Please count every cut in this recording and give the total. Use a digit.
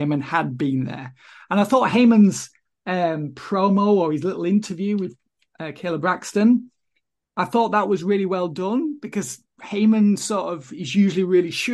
0